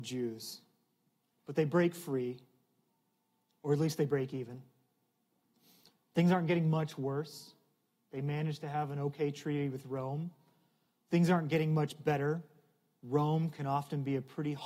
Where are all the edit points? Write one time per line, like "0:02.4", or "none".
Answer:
none